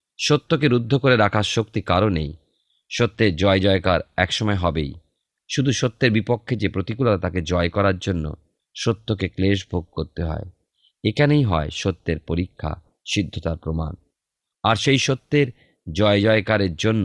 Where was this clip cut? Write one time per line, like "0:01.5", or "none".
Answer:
none